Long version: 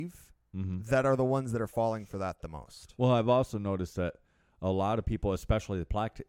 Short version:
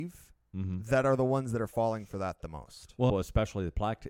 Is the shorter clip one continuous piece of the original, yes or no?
no